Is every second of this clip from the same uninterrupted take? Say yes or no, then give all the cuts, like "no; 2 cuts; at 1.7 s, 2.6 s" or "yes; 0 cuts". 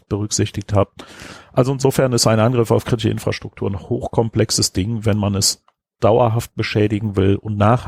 yes; 0 cuts